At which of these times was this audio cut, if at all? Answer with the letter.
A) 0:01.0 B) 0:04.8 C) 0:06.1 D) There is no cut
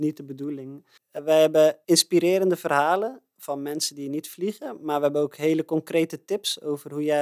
A